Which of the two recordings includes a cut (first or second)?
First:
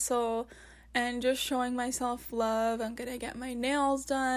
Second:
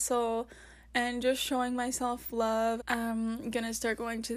second